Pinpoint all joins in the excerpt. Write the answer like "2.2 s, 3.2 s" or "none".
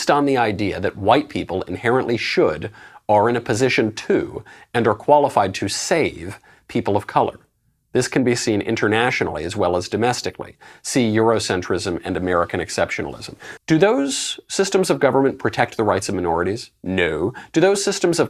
13.6 s